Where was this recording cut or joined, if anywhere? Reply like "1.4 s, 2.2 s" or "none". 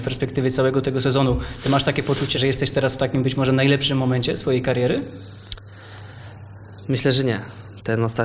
2.3 s